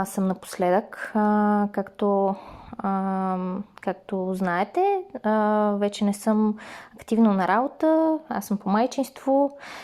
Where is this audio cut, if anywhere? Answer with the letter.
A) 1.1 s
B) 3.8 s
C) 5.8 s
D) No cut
D